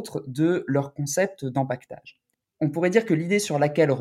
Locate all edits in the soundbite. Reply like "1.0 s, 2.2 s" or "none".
2.4 s